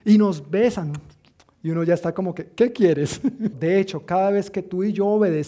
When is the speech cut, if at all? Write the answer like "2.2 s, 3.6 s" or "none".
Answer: 3.5 s